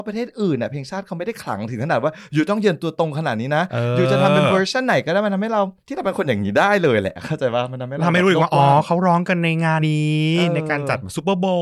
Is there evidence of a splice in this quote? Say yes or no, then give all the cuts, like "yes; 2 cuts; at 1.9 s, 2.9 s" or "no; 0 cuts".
yes; 2 cuts; at 5.8 s, 9.8 s